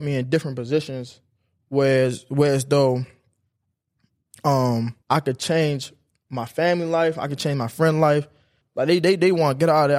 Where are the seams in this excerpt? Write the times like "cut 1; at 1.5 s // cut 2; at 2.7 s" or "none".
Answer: cut 1; at 5.0 s // cut 2; at 8.6 s